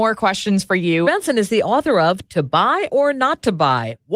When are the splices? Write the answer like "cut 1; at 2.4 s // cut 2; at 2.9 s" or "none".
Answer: cut 1; at 1.0 s